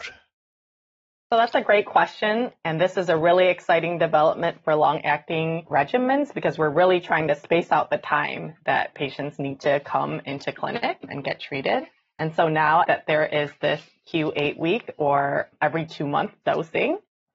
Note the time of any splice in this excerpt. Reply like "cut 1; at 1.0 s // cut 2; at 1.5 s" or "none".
cut 1; at 12.8 s